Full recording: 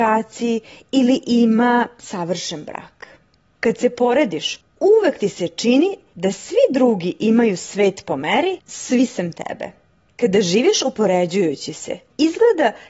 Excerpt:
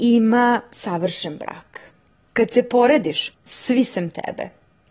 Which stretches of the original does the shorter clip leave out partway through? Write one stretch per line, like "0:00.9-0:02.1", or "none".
0:04.7-0:08.6